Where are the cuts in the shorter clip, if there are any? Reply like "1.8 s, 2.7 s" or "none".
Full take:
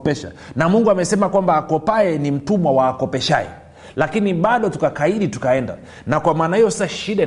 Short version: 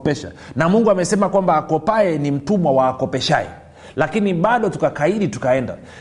none